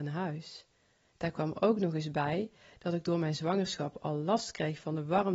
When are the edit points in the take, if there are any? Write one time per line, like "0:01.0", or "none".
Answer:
0:01.0